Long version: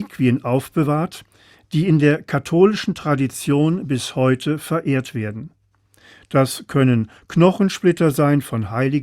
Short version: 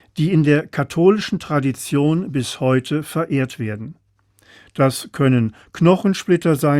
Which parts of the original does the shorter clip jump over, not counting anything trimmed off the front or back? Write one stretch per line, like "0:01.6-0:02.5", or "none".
none